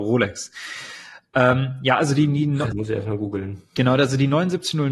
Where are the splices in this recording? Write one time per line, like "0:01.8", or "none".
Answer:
0:02.7